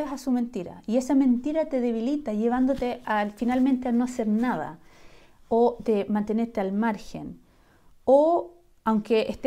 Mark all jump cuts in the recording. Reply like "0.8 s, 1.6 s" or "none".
none